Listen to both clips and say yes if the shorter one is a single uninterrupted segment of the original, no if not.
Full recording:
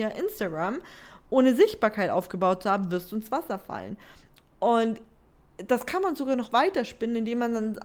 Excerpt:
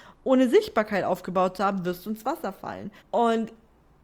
no